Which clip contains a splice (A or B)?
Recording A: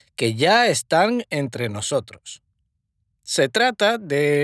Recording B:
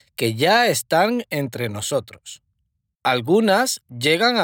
B